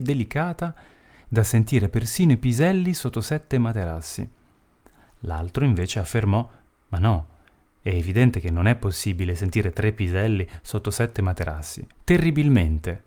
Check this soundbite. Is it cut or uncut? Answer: cut